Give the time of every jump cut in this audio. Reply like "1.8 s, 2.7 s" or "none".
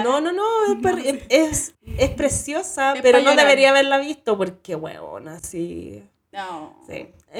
6.3 s